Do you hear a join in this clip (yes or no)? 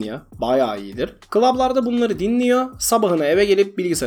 no